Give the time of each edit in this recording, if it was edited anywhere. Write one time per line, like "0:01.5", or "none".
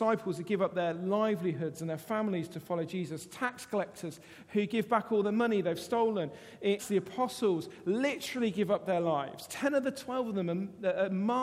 0:06.8

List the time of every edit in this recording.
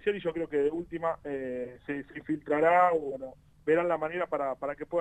none

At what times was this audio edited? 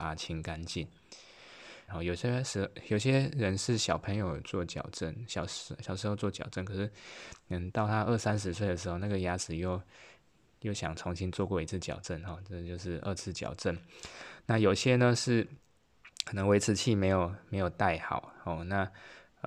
0:01.9

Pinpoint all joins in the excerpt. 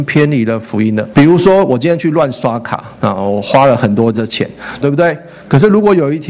0:01.1
0:04.8

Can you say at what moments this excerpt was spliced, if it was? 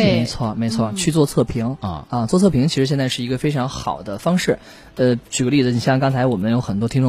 none

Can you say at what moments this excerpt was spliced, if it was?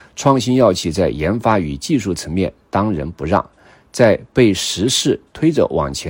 none

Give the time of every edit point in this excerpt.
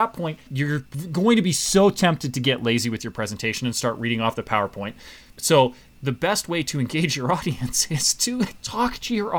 none

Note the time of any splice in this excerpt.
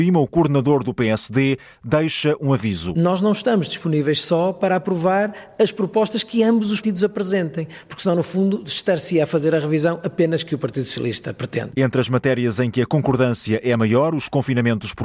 0:06.8

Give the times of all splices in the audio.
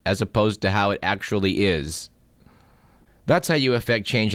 none

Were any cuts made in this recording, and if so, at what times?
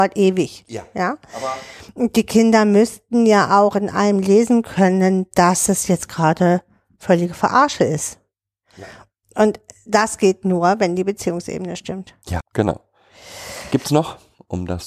0:12.4

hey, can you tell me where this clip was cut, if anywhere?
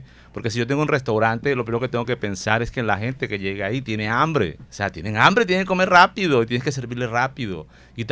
0:04.7

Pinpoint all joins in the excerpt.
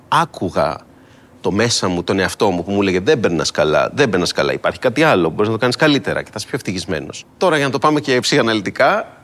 none

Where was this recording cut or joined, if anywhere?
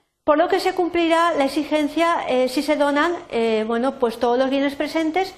none

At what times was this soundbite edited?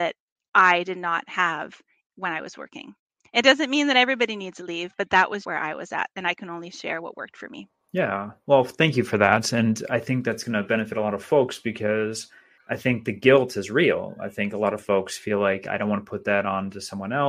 0:05.4

